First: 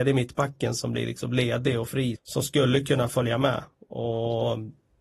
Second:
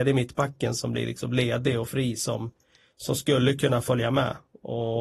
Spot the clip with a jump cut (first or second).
first